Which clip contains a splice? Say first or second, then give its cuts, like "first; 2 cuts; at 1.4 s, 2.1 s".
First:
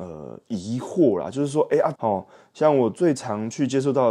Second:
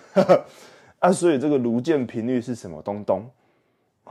first; 1 cut; at 1.9 s